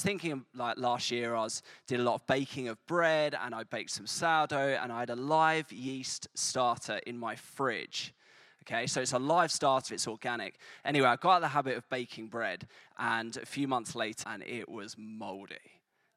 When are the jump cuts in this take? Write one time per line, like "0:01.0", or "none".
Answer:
0:09.9
0:14.2